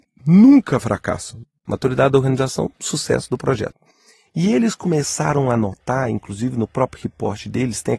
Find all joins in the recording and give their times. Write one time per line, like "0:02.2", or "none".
0:01.7